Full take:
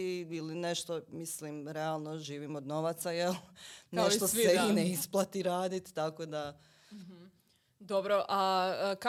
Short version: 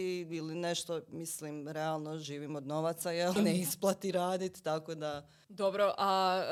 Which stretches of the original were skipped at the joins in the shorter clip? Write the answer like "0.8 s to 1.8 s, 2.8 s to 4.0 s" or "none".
3.4 s to 4.7 s, 6.8 s to 7.8 s